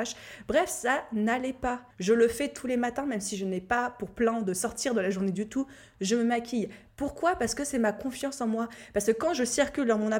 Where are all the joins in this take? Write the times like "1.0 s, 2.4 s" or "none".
1.9 s, 6.9 s